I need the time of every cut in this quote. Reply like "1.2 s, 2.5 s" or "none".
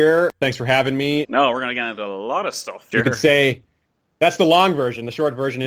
1.2 s, 2.9 s